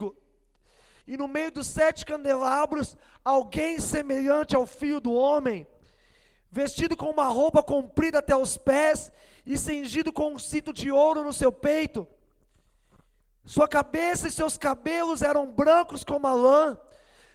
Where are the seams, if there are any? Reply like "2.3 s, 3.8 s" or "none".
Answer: 1.0 s